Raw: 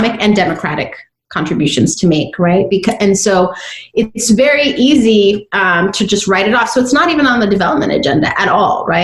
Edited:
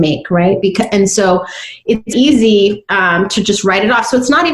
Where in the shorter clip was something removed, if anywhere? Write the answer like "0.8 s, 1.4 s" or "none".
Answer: 2.1 s